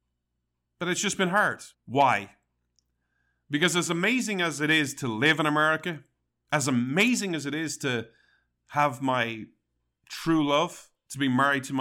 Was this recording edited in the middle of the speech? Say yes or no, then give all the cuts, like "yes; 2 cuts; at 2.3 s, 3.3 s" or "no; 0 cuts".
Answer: yes; 1 cut; at 1.7 s